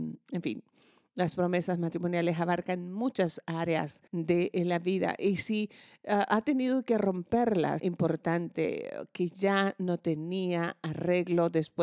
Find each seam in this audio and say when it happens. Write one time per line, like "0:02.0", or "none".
0:04.1
0:07.8